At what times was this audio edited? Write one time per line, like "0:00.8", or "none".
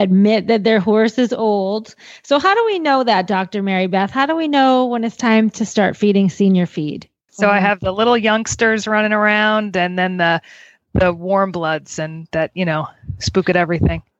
0:07.3